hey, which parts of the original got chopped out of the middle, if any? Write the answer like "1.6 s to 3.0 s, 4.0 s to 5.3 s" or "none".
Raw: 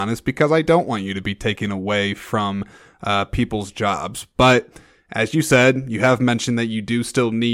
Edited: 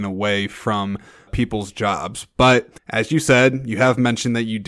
2.9 s to 3.3 s, 4.8 s to 5.0 s